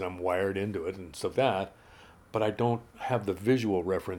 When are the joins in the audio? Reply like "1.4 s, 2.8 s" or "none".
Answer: 1.3 s, 2.9 s